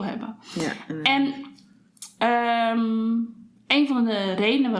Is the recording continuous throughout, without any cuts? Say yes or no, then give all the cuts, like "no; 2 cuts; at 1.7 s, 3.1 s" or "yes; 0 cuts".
yes; 0 cuts